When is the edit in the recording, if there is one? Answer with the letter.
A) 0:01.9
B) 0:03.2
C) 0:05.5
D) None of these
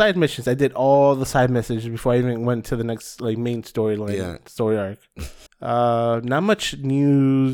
C